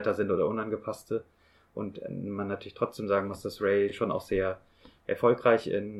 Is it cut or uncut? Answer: uncut